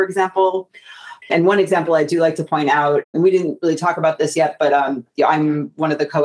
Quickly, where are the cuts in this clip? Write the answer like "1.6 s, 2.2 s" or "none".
1.2 s